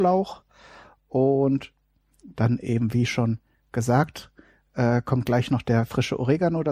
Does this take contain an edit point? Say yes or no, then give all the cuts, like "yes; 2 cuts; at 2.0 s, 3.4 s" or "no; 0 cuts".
no; 0 cuts